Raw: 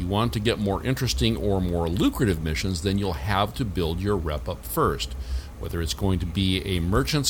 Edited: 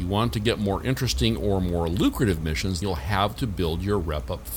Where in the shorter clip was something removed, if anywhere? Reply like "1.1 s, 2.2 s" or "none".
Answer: 2.8 s